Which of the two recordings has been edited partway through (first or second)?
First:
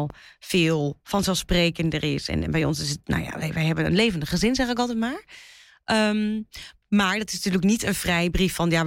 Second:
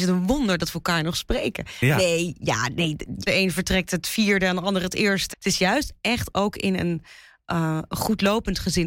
second